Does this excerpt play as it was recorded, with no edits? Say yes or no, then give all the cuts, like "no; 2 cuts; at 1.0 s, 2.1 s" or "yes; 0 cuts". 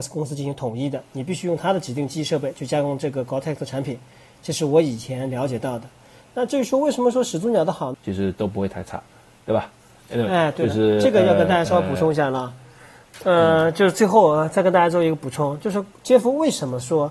no; 1 cut; at 7.9 s